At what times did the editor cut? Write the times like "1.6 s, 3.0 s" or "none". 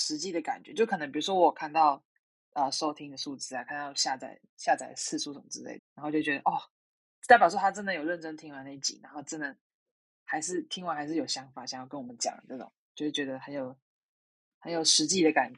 5.8 s